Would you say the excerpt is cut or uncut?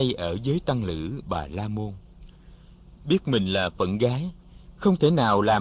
uncut